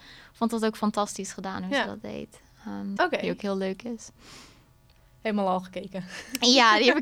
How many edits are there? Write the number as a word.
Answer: one